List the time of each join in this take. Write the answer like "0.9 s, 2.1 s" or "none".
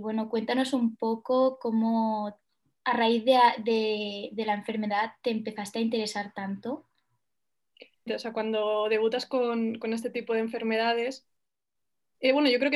8.1 s

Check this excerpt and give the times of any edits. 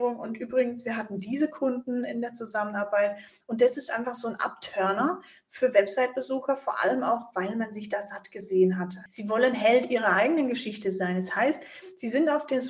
9.1 s

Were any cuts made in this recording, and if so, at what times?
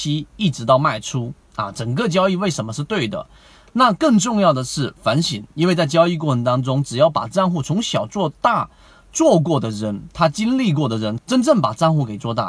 11.2 s

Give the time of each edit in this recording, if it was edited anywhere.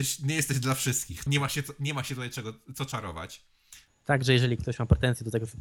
1.3 s, 3.9 s

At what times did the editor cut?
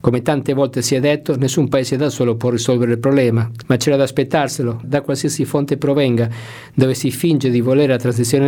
3.6 s, 4.8 s

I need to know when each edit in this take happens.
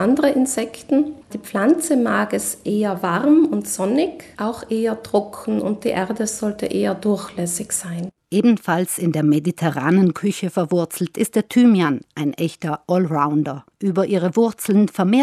1.2 s, 13.7 s

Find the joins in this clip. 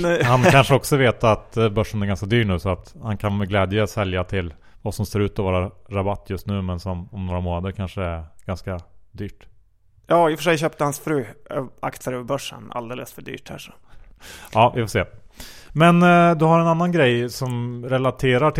none

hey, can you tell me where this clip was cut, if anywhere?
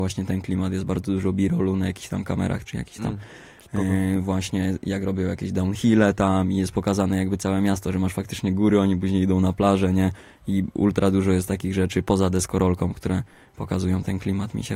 2.6 s

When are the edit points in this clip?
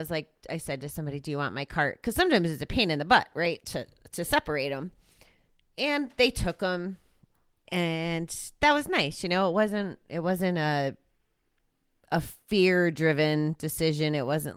none

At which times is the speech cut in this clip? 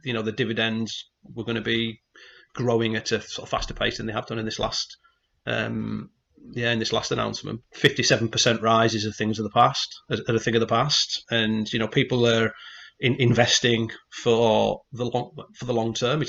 7.6 s, 11.2 s

